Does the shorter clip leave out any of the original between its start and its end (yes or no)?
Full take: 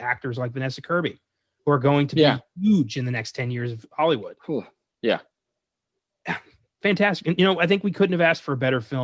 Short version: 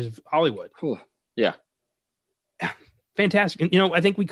no